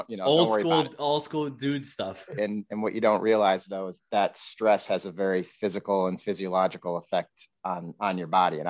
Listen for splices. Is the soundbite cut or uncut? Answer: cut